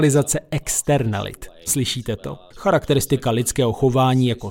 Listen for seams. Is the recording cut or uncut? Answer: cut